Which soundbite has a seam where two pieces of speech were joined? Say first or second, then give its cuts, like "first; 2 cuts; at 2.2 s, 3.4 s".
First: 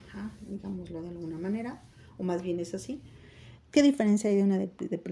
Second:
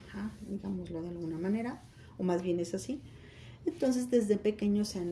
first; 1 cut; at 3.6 s